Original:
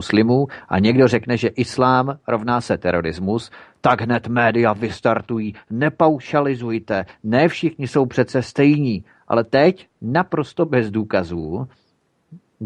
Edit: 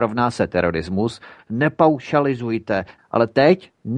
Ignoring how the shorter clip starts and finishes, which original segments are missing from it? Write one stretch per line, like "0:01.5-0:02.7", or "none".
0:03.7-0:05.6
0:07.2-0:09.1